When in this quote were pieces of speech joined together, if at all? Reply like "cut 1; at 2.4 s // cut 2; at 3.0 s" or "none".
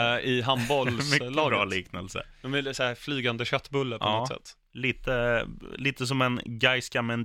none